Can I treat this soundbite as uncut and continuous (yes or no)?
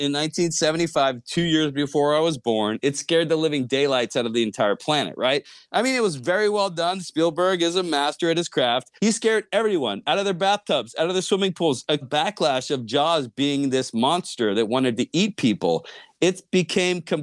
no